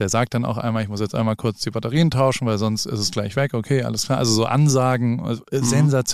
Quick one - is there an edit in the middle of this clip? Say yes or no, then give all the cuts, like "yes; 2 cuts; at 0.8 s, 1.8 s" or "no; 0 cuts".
no; 0 cuts